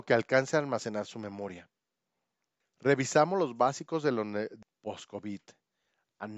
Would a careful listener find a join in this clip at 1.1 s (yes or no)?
no